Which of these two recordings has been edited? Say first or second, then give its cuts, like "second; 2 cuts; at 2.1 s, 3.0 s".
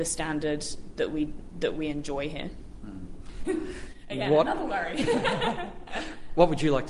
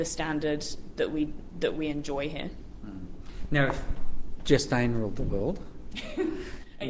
first; 1 cut; at 3.4 s